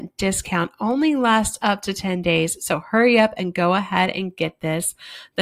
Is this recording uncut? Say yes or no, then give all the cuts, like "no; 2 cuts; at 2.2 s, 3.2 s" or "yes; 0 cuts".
yes; 0 cuts